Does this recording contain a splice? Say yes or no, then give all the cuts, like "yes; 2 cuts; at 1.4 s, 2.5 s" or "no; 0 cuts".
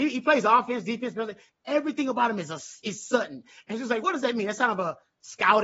yes; 1 cut; at 4.0 s